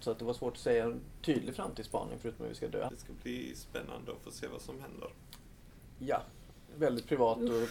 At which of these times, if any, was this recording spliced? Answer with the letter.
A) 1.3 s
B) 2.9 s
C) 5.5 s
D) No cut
B